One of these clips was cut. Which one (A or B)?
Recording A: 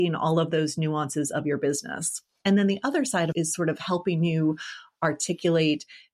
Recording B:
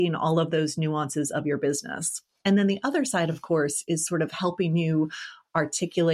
A